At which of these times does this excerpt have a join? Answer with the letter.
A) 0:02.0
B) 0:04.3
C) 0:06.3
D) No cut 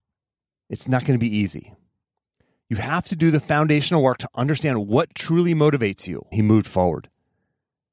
C